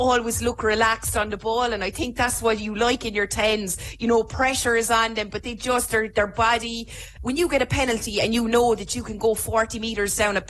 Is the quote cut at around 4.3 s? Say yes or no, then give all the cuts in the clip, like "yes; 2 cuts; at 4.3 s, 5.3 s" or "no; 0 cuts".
no; 1 cut; at 7.2 s